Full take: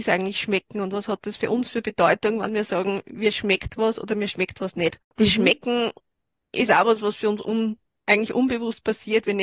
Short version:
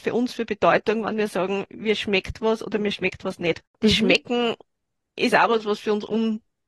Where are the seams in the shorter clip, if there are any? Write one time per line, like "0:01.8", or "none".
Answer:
none